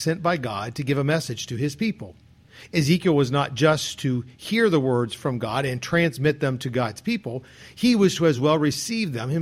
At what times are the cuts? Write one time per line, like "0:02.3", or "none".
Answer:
none